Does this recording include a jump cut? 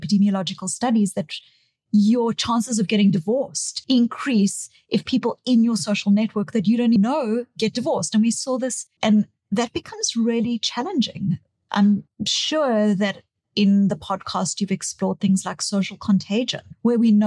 yes; 2 cuts; at 7.0 s, 9.0 s

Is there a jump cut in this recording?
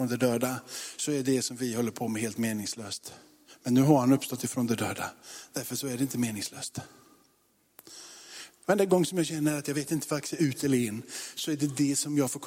no; 0 cuts

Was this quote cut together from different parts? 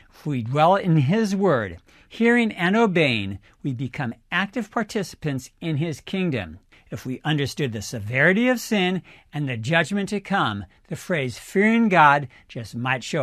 yes; 1 cut; at 6.7 s

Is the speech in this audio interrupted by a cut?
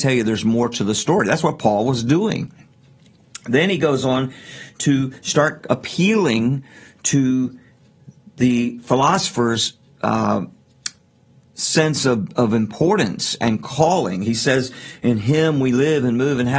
no; 0 cuts

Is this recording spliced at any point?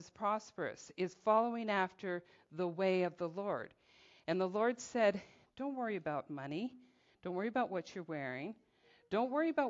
no; 0 cuts

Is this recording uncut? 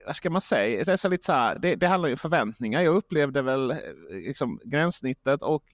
yes; 0 cuts

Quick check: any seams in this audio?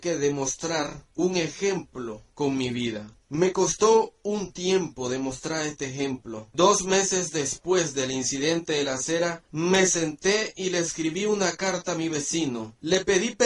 no; 0 cuts

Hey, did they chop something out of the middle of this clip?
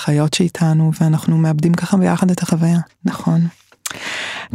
yes; 1 cut; at 2.9 s

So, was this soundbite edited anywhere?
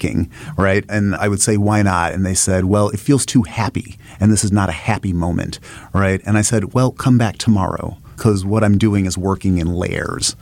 no; 0 cuts

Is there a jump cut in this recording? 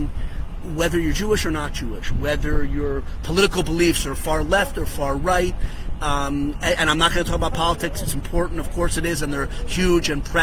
no; 0 cuts

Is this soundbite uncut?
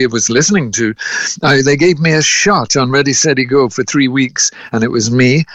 yes; 0 cuts

